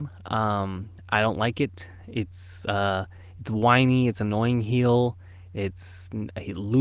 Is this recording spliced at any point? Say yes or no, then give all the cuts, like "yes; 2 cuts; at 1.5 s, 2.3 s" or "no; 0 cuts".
no; 0 cuts